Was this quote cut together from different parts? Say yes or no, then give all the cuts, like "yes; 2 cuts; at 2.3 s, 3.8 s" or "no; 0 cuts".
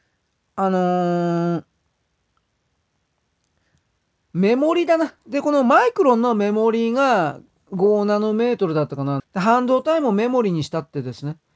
yes; 2 cuts; at 5.2 s, 9.2 s